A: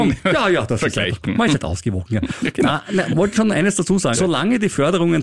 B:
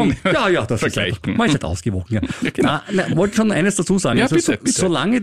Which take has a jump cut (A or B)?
A